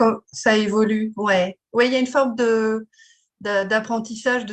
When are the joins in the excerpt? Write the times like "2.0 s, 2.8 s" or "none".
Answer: none